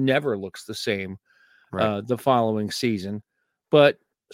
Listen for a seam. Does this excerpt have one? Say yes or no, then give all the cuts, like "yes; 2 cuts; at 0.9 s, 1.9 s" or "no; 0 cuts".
no; 0 cuts